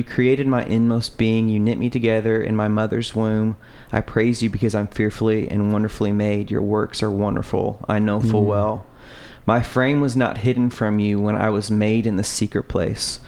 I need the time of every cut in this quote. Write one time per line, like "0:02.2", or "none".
none